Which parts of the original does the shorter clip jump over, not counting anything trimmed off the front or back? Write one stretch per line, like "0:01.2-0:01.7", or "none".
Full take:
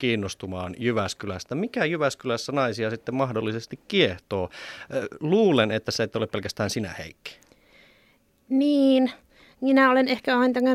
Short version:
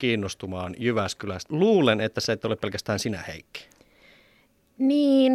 0:01.5-0:05.2